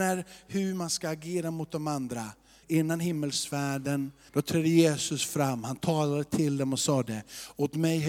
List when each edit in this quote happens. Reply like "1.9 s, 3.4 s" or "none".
2.6 s, 4.3 s